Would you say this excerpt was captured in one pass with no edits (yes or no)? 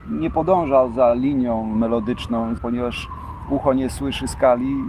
no